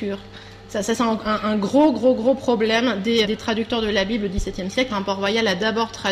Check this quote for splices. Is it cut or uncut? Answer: cut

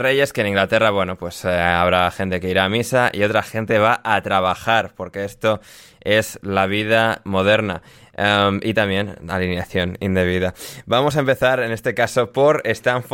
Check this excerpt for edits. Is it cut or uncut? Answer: uncut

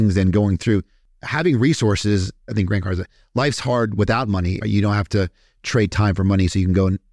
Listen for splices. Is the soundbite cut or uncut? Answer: cut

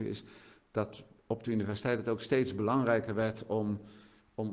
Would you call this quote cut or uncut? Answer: uncut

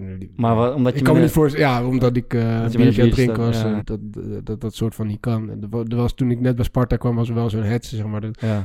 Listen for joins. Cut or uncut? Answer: cut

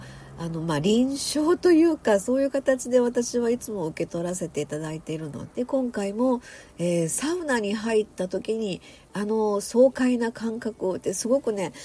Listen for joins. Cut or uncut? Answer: cut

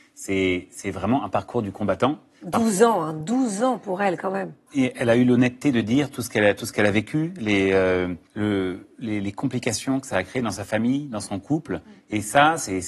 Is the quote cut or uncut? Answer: cut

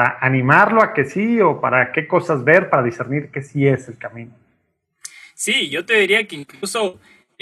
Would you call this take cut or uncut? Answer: uncut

